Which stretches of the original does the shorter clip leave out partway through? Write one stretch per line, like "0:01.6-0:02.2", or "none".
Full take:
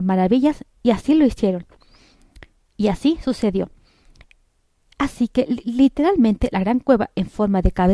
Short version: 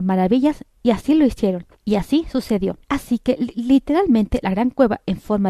0:01.8-0:02.7
0:03.8-0:04.9